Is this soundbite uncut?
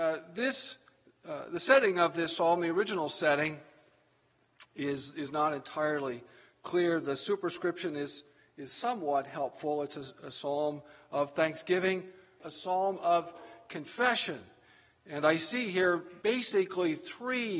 no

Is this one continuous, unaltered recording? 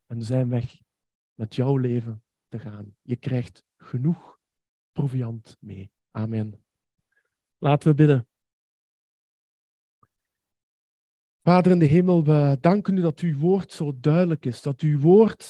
no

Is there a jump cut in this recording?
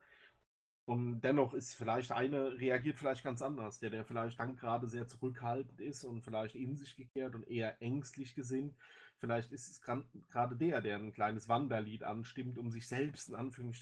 no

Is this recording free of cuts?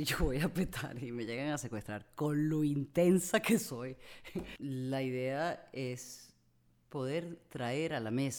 no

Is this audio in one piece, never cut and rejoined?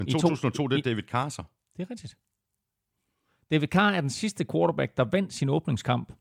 yes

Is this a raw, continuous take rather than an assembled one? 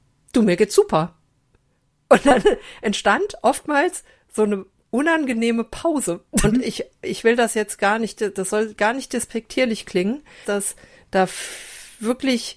no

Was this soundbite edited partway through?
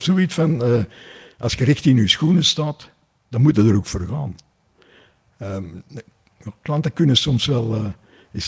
no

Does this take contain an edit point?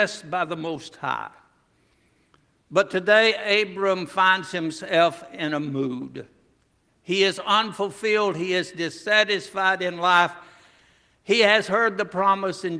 no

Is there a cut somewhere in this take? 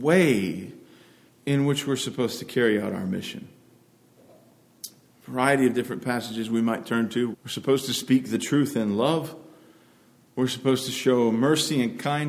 yes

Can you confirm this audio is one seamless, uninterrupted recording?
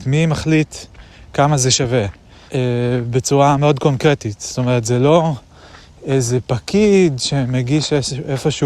no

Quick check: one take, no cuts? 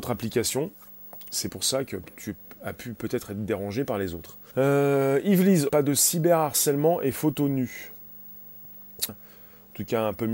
no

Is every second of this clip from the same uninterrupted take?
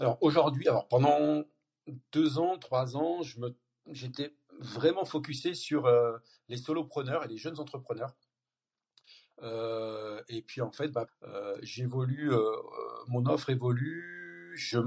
no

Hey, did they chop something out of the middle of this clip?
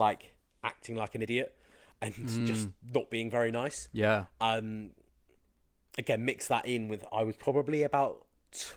no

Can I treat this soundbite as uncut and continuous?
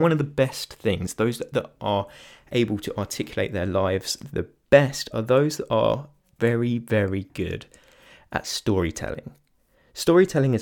yes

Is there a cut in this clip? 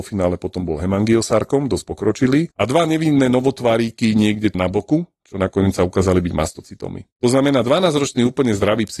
yes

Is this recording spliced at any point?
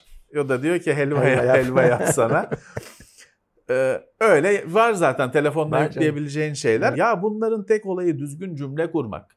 yes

